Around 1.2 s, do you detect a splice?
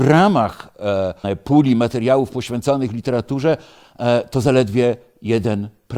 yes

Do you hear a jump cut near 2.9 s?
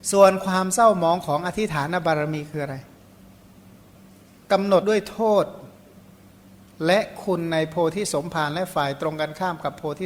no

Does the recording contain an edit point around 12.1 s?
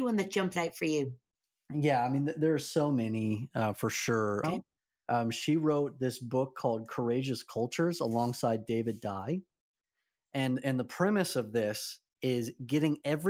yes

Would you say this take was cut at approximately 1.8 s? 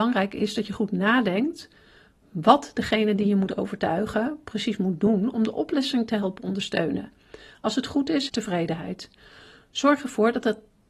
no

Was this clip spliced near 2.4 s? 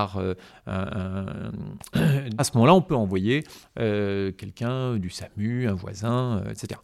yes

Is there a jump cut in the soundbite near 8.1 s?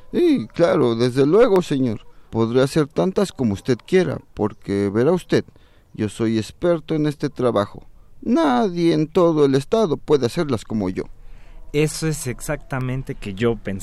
no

